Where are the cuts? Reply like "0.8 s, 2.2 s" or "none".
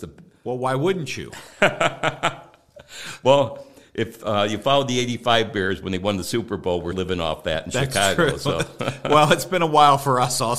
6.9 s